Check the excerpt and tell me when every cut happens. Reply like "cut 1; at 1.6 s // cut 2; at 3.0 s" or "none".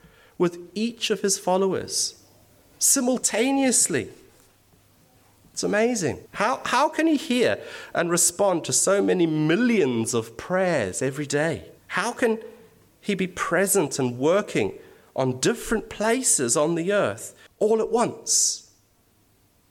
cut 1; at 6.3 s // cut 2; at 11.8 s // cut 3; at 17.5 s